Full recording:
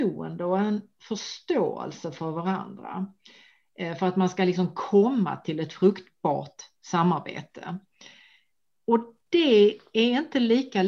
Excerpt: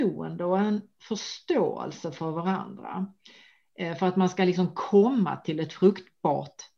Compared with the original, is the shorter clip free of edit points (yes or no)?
yes